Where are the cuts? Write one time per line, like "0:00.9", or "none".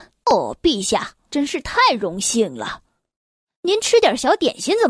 0:01.3

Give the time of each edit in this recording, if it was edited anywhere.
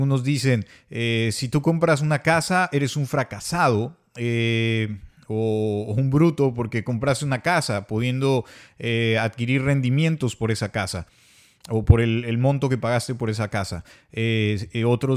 none

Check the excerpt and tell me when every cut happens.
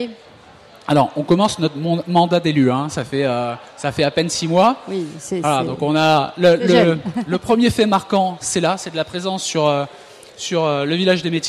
none

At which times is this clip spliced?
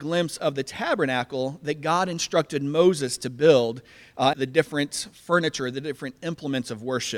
0:04.3

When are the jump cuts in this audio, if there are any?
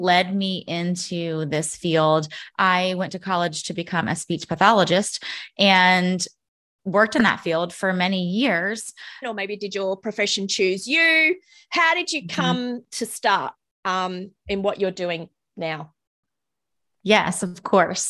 0:02.5
0:09.2

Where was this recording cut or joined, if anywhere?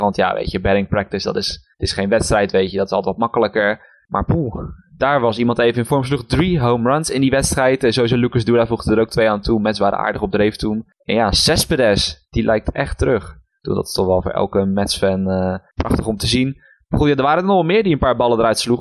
none

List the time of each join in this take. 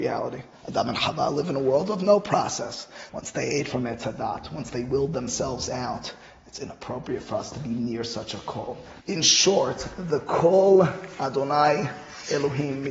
0:03.1
0:09.0

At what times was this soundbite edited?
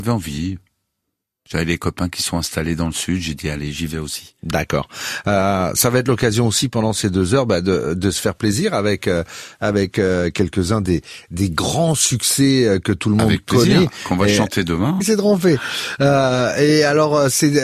0:15.0

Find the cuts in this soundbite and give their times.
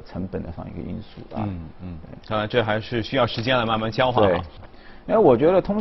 0:04.6

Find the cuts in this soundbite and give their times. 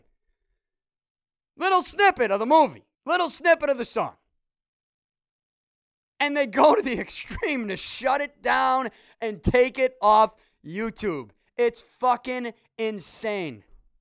0:02.9

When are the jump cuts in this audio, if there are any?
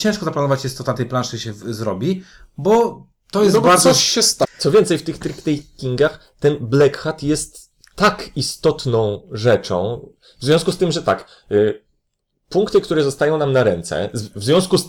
0:04.4

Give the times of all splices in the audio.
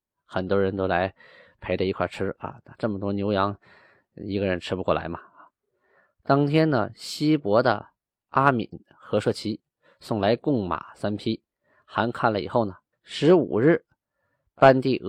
0:12.9

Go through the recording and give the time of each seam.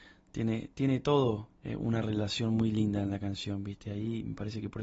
0:01.6

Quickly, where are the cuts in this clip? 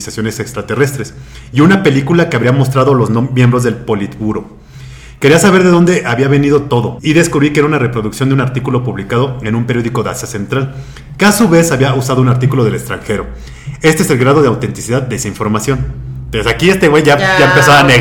none

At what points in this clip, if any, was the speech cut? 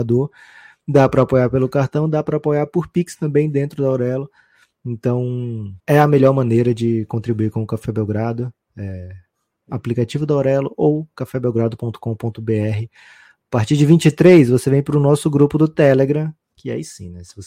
0:05.8

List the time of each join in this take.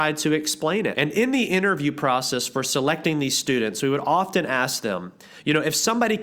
0:00.9

